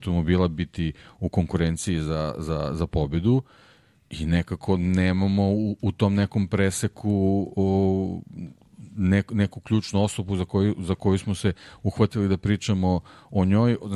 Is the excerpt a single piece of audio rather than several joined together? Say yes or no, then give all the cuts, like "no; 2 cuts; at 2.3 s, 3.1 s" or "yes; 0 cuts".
yes; 0 cuts